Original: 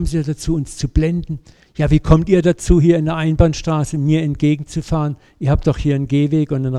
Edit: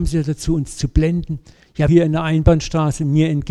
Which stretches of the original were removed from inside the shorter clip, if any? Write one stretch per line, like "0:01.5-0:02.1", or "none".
0:01.9-0:02.8